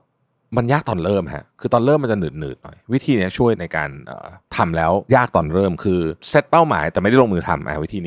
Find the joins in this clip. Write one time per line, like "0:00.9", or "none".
0:04.4
0:06.2